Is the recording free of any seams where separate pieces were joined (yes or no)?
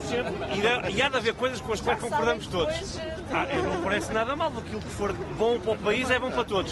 no